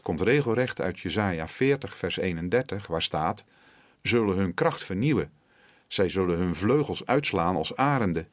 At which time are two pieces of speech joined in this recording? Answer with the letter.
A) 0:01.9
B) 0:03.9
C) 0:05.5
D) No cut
B